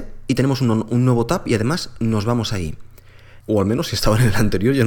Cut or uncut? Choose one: cut